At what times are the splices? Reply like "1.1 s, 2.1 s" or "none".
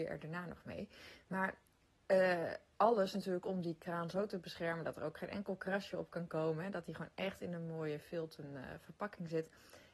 none